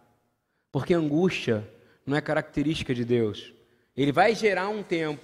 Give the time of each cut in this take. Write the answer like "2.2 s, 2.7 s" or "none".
none